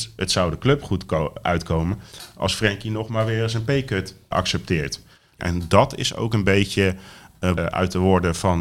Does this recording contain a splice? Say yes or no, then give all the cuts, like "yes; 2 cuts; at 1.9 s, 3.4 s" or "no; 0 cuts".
yes; 3 cuts; at 4.3 s, 5.4 s, 7.6 s